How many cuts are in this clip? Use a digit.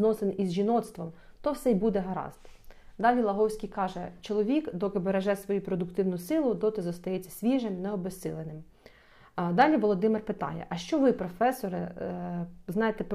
0